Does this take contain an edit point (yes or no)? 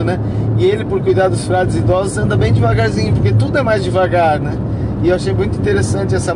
no